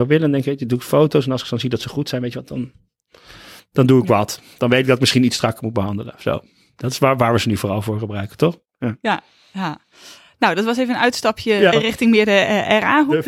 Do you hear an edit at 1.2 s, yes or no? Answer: no